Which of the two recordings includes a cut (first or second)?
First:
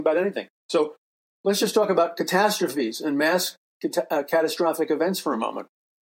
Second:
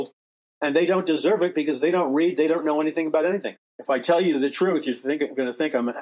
second